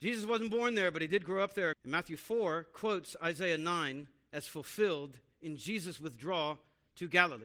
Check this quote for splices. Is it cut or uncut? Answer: cut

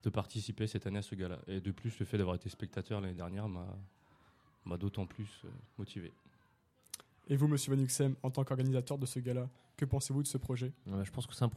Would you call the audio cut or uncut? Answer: uncut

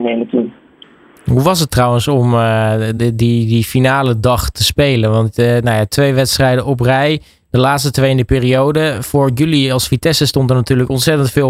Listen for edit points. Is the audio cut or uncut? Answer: uncut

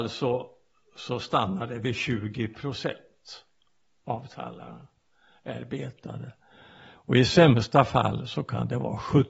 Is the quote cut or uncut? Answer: uncut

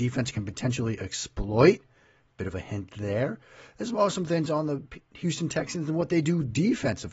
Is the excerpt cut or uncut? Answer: uncut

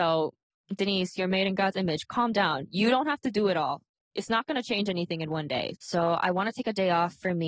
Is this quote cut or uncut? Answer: cut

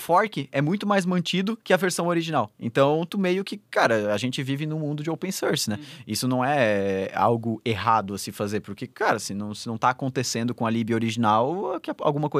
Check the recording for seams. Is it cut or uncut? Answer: uncut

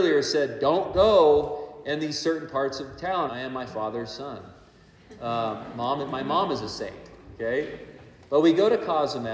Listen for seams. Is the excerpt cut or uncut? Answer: cut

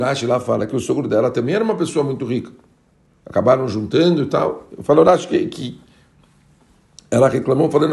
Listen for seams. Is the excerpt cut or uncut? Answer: uncut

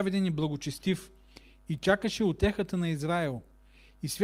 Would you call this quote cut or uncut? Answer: uncut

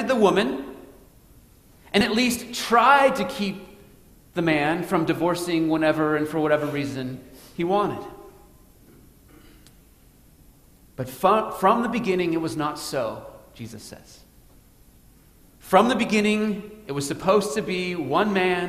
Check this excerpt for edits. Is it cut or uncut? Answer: uncut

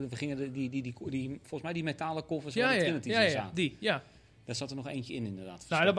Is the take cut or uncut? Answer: uncut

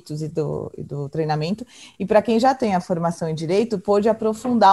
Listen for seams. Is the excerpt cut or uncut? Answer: uncut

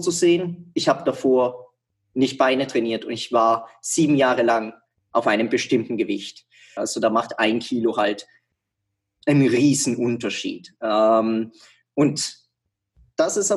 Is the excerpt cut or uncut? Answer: cut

